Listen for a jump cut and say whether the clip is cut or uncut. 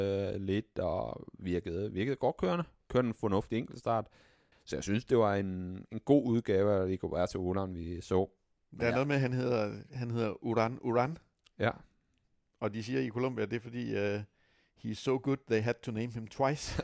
cut